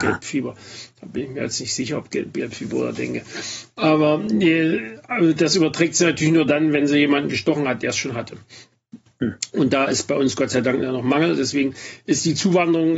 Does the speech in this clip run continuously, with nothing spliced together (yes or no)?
yes